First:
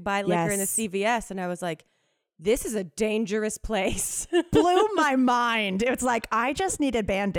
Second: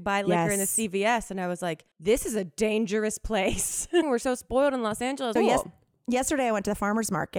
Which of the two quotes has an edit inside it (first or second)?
second